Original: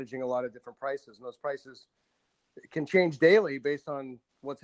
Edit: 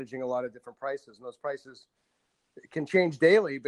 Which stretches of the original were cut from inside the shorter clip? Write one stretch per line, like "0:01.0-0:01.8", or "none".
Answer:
none